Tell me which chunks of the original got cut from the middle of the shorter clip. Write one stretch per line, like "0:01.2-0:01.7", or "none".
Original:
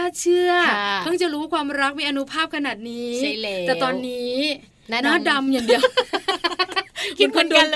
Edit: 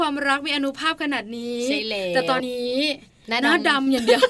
0:03.9-0:04.0